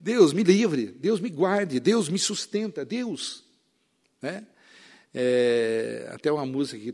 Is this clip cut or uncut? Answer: uncut